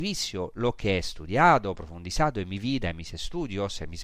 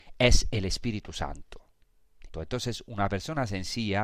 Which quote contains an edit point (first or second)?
second